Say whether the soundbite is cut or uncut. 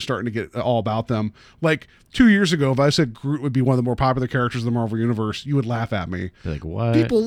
uncut